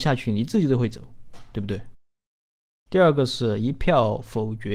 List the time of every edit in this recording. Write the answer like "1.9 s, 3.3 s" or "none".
2.9 s

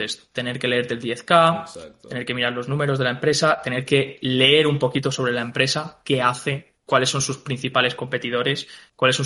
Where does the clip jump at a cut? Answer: none

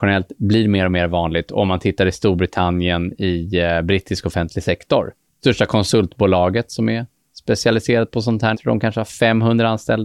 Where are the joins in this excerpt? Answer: 5.3 s, 8.5 s

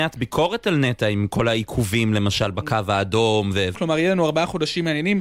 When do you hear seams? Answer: 3.7 s

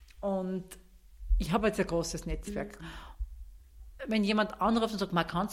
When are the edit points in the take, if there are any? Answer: 2.8 s, 4.0 s

